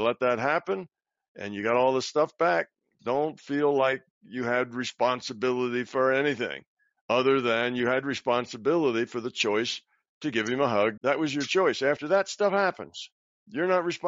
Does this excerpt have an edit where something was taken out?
yes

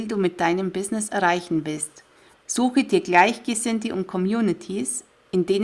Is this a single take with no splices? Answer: no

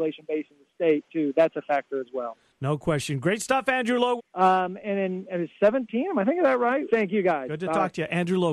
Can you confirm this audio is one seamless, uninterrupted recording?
no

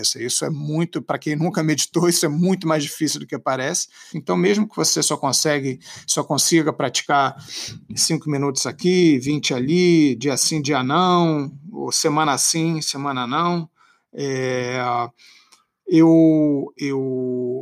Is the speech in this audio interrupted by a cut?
yes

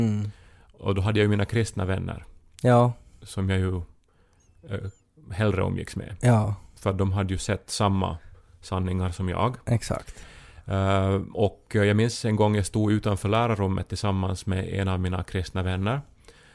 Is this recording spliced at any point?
no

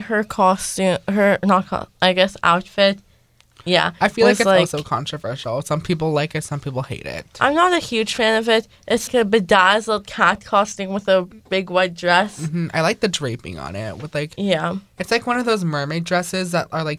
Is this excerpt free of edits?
no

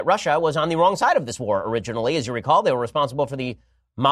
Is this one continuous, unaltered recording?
yes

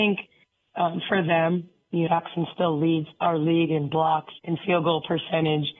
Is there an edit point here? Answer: yes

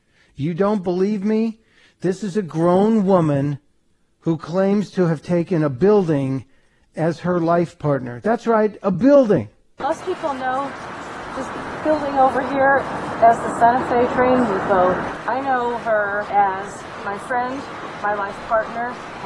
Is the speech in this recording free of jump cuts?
yes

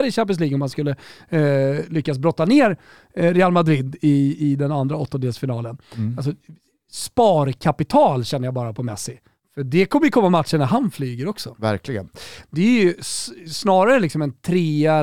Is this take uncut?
no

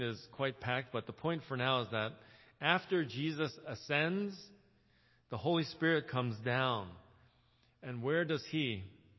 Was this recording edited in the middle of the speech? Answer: no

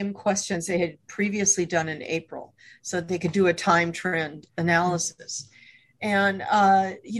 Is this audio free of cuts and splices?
yes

